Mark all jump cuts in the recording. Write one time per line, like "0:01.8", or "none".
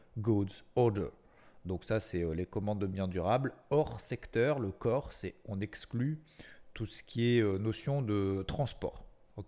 none